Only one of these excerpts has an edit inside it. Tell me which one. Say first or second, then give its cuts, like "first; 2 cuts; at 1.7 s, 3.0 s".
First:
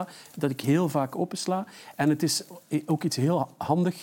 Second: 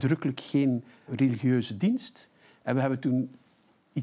second; 1 cut; at 1.1 s